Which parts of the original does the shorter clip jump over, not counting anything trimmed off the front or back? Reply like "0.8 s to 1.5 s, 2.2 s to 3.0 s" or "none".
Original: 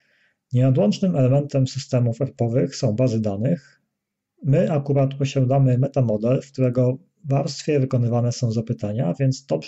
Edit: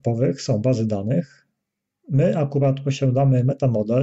none